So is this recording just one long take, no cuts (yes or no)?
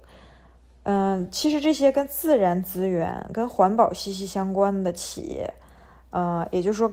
yes